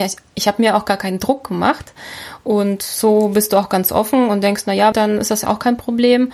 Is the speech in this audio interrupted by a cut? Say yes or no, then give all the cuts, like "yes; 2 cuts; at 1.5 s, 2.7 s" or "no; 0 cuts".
yes; 1 cut; at 4.9 s